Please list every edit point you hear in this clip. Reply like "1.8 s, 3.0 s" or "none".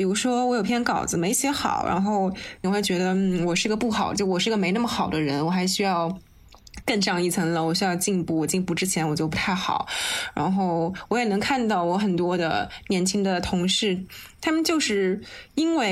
2.6 s